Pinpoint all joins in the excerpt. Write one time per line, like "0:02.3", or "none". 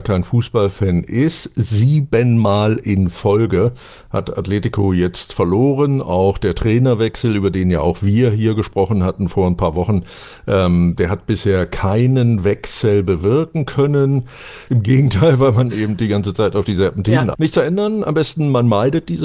0:14.7
0:17.3